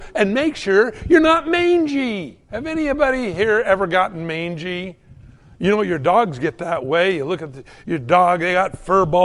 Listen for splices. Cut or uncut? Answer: cut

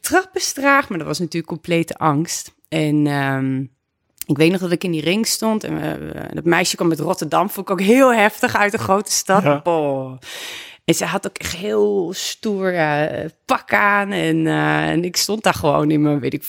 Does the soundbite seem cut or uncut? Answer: uncut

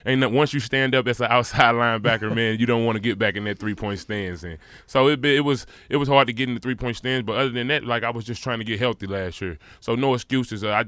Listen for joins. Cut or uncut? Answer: uncut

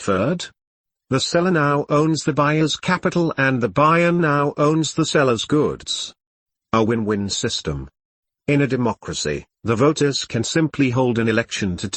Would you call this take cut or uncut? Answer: uncut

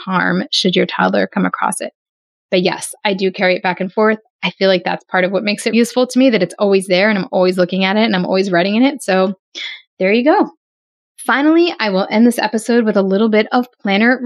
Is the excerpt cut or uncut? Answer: cut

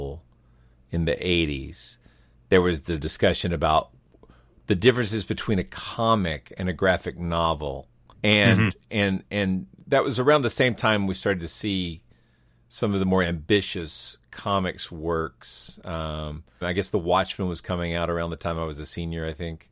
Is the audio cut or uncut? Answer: cut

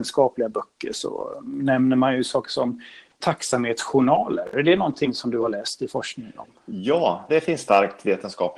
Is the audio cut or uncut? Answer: cut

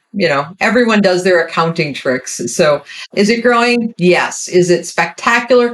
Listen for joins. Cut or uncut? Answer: cut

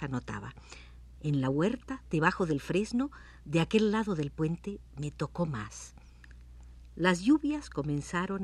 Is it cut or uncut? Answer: cut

